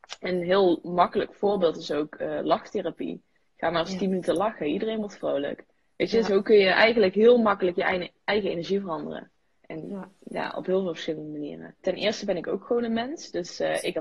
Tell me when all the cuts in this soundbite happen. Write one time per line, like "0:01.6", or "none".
0:11.8